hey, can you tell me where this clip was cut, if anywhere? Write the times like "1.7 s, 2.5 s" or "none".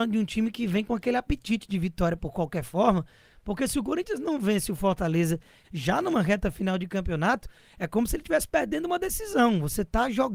5.6 s